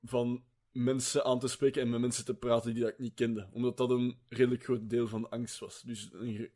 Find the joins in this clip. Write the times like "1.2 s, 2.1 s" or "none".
none